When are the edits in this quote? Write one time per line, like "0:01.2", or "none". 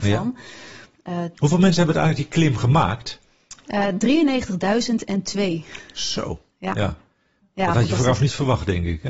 0:01.3

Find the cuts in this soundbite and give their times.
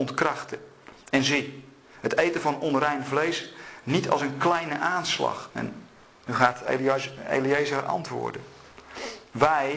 0:05.5

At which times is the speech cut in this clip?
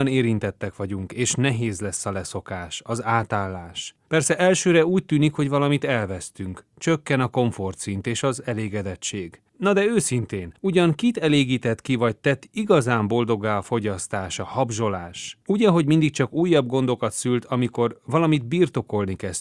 0:04.0

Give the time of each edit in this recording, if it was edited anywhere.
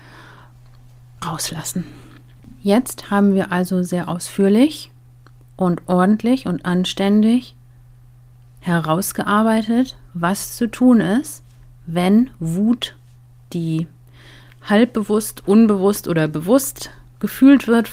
none

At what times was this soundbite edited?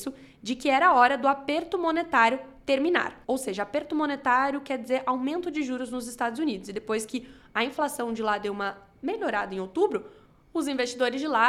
0:03.2

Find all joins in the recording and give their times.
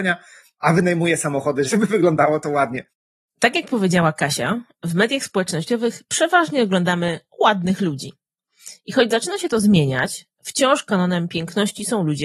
0:01.7

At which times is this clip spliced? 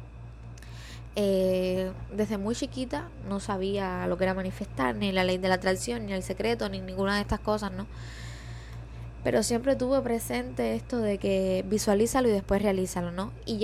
none

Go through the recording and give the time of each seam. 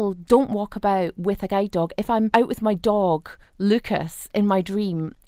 none

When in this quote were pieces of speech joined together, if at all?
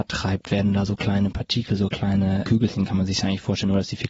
0:02.4

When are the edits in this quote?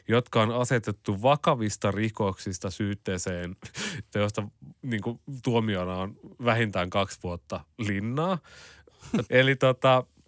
0:04.1
0:09.3

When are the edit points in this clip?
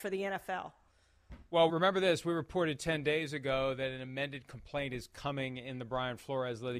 0:01.7

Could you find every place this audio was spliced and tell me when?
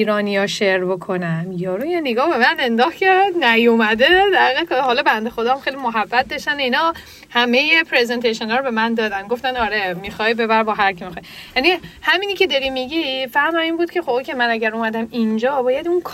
none

